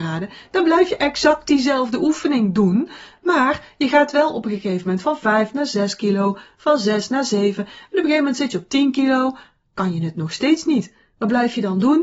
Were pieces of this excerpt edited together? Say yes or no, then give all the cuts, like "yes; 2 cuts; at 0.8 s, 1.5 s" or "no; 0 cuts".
no; 0 cuts